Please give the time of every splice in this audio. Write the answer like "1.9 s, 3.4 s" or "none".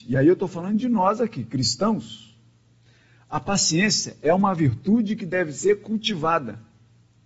none